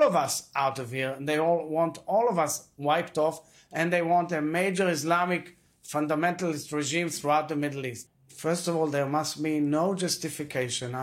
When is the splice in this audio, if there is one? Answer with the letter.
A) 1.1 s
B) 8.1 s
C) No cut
B